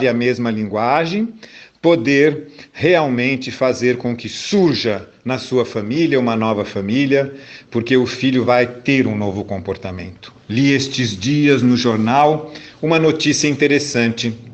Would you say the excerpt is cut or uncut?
uncut